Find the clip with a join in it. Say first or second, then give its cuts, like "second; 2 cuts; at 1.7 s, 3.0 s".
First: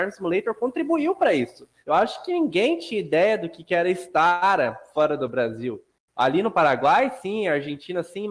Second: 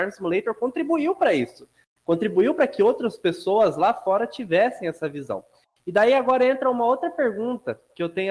first; 1 cut; at 1.8 s